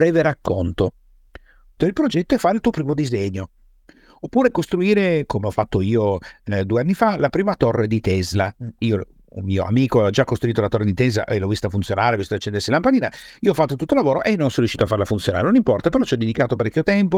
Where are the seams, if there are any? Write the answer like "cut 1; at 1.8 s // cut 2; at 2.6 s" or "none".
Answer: cut 1; at 1.8 s